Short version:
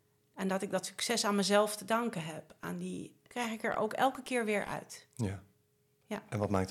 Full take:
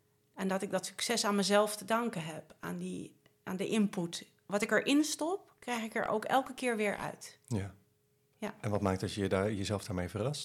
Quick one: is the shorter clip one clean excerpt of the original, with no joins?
no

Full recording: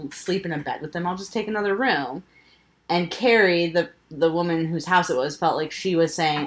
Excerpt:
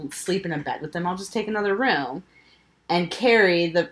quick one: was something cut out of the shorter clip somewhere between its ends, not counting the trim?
no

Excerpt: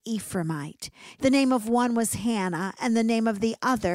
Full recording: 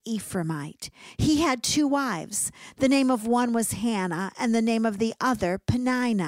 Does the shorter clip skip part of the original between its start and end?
yes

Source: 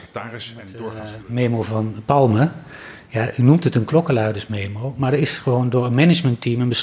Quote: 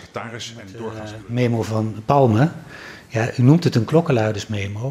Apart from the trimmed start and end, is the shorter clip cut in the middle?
no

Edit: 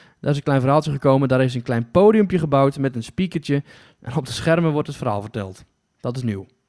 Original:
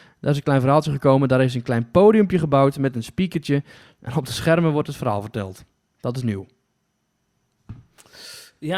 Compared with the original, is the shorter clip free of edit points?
yes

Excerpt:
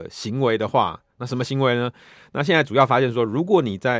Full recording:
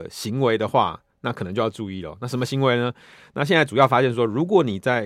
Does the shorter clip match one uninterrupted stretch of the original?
no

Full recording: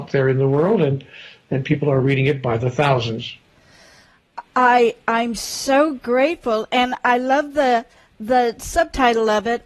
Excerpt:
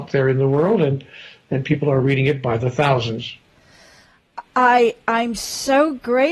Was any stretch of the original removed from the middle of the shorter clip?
no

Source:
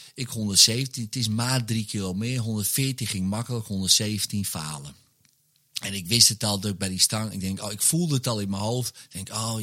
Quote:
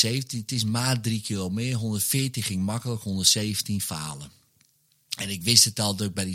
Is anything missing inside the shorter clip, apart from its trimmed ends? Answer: no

